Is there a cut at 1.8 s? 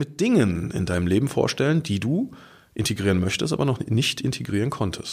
no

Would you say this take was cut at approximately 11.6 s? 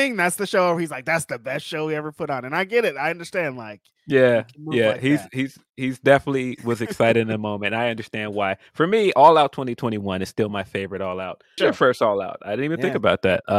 yes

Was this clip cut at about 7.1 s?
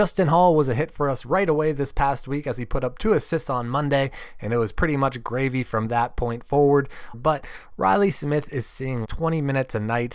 yes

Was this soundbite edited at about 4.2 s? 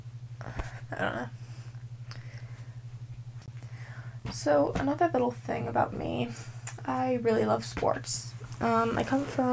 no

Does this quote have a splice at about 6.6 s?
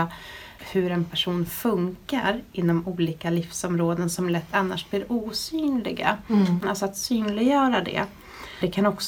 yes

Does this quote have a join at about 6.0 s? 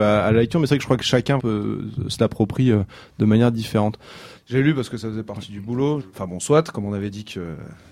yes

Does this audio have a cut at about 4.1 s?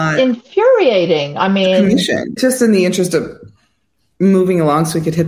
no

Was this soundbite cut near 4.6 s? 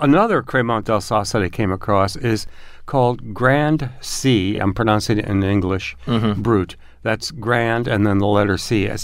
no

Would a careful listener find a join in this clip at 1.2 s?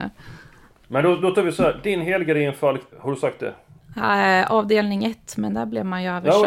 no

